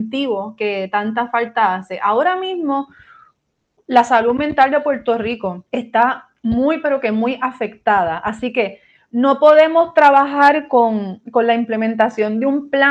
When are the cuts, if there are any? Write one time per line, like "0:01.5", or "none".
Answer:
none